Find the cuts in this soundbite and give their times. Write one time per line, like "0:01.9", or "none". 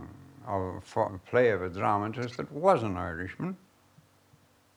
0:01.1

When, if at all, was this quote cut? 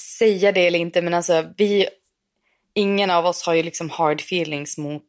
none

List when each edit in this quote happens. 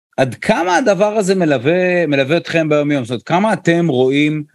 none

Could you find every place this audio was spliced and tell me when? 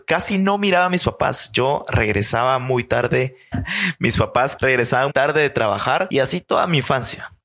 0:03.5
0:05.1

